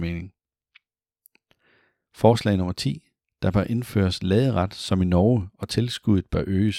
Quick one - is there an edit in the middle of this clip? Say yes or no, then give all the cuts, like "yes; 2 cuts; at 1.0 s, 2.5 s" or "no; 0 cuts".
no; 0 cuts